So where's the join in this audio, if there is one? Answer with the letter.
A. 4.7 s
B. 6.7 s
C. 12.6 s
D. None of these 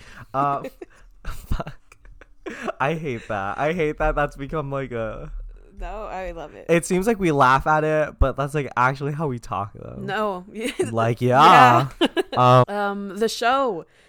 C